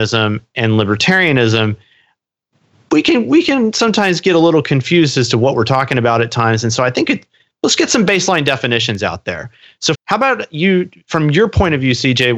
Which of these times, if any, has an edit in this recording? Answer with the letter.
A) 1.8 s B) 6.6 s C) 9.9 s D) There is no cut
C